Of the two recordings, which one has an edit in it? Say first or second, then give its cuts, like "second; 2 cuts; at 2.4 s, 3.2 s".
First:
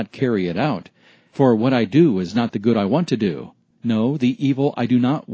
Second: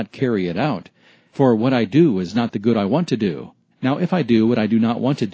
second; 1 cut; at 3.7 s